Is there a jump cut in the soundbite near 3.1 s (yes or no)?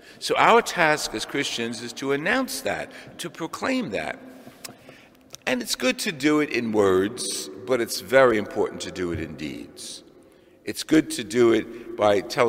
yes